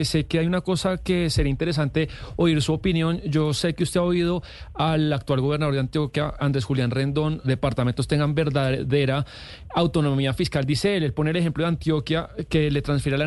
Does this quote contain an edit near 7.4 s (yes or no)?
yes